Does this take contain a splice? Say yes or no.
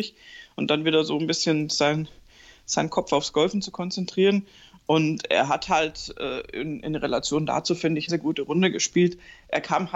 yes